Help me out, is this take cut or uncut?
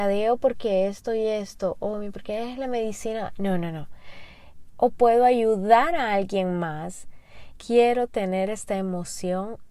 cut